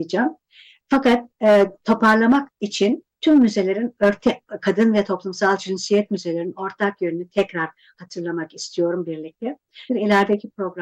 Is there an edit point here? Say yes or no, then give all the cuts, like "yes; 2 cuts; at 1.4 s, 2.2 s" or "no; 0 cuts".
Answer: yes; 1 cut; at 9.9 s